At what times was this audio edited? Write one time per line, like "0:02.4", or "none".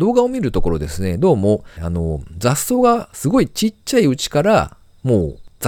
0:01.8